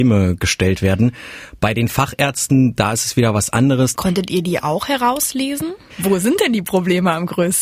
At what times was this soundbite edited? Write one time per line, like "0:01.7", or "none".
0:03.9
0:05.9